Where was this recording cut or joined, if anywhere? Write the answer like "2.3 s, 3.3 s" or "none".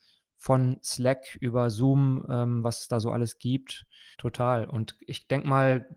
4.1 s